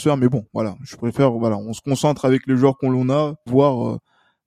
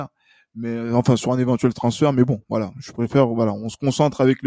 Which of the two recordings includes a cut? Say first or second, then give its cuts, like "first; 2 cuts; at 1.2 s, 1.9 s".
first; 1 cut; at 3.5 s